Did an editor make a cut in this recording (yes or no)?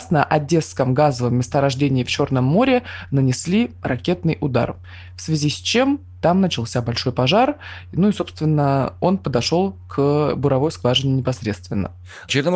no